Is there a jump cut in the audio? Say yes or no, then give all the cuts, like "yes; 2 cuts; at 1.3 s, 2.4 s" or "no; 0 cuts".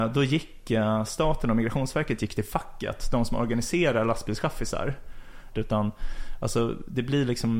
yes; 1 cut; at 5.5 s